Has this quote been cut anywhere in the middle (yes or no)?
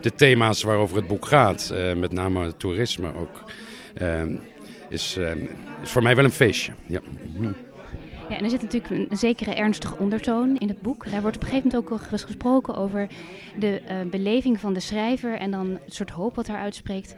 no